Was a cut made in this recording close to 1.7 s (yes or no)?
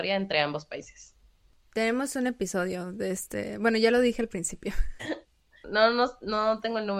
no